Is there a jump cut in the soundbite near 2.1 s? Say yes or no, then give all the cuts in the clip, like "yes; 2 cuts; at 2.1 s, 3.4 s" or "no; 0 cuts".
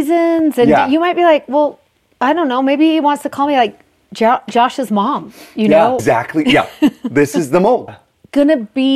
no; 2 cuts; at 6.0 s, 7.9 s